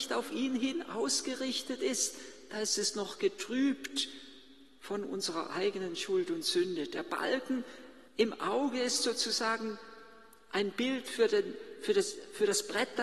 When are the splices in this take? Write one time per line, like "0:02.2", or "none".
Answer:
0:08.1